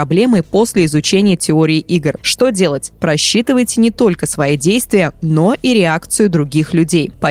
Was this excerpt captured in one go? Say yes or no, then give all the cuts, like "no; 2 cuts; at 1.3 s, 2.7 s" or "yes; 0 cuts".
no; 1 cut; at 2.2 s